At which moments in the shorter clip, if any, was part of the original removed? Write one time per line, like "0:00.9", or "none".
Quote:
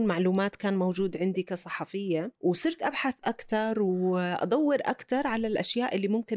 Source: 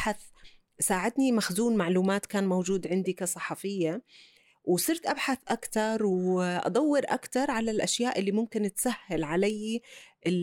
0:02.4